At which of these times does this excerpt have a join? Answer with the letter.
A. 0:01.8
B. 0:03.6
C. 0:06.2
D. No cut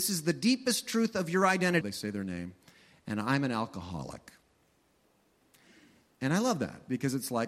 A